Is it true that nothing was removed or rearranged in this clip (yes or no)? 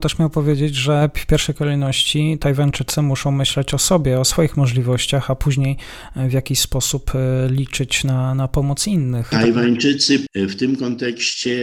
no